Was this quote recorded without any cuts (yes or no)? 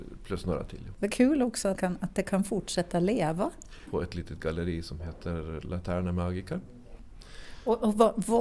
no